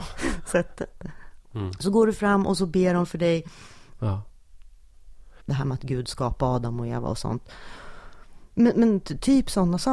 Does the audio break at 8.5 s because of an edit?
no; 3 cuts; at 1.4 s, 4.0 s, 5.4 s

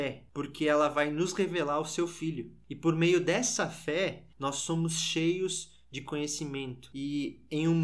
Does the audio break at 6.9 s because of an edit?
yes; 1 cut; at 6.9 s

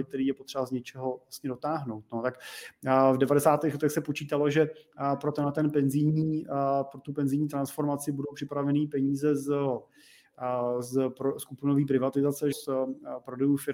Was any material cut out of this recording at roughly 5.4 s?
no; 1 cut; at 12.5 s

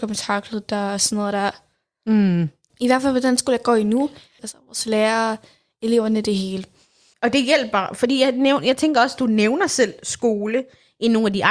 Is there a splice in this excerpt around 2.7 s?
yes; 3 cuts; at 2.7 s, 4.4 s, 7.1 s

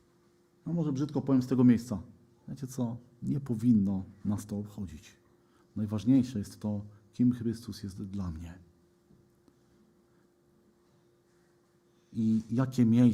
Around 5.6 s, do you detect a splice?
no; 0 cuts

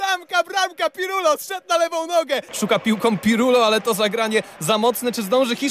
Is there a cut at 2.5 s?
yes; 1 cut; at 2.5 s

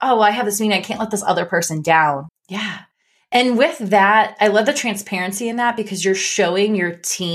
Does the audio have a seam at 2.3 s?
yes; 1 cut; at 2.3 s

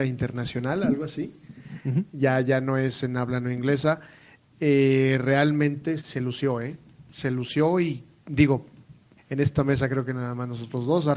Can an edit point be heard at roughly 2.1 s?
no; 2 cuts; at 6.0 s, 9.2 s

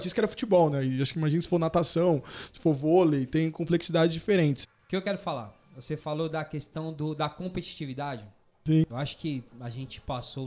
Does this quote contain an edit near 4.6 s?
yes; 2 cuts; at 4.6 s, 8.9 s

